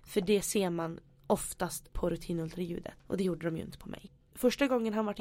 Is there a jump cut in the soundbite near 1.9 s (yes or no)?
yes